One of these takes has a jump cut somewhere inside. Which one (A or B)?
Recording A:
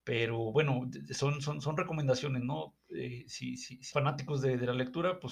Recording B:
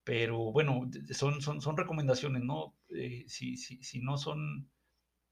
A